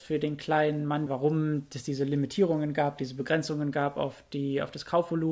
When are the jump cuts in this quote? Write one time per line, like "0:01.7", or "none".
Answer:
0:01.1